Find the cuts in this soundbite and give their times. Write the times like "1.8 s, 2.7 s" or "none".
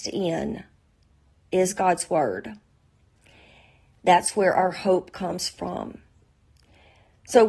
none